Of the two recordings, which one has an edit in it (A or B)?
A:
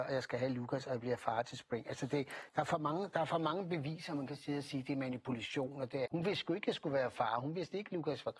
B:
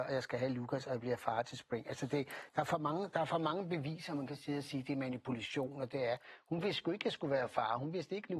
A